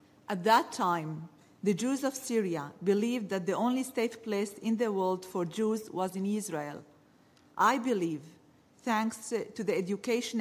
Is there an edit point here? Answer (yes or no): no